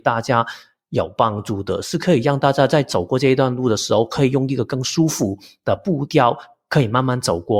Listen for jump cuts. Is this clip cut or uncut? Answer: uncut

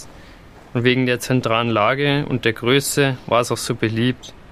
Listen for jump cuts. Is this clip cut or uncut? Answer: uncut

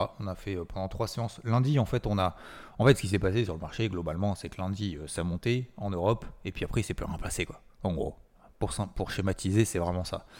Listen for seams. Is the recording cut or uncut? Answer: uncut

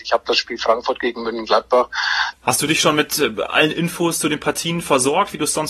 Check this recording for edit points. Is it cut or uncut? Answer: cut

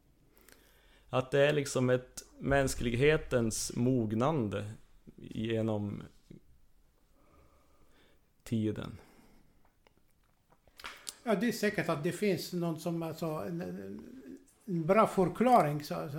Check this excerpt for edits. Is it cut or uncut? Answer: uncut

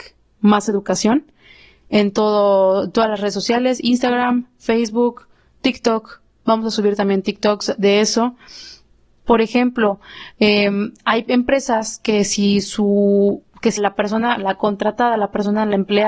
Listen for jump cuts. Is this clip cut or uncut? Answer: cut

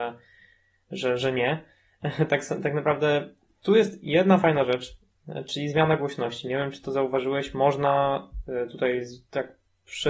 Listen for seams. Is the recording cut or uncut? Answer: uncut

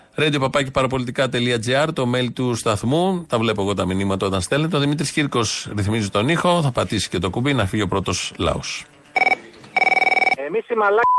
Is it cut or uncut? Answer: uncut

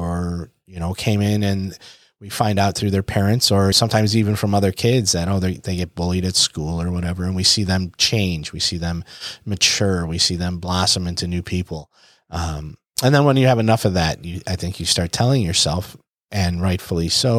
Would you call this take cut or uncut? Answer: cut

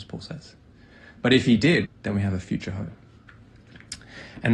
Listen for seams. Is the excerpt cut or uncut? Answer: cut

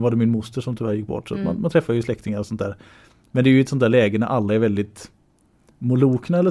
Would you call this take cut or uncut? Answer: uncut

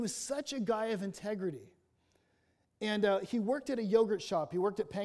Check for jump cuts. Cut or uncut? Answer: uncut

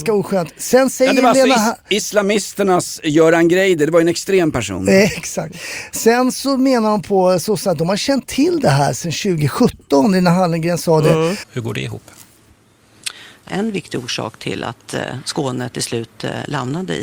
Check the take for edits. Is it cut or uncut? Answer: cut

